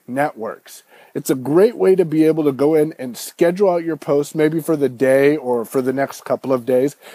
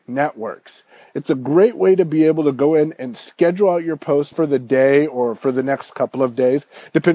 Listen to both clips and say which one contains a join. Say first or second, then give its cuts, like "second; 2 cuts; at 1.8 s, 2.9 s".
second; 1 cut; at 4.3 s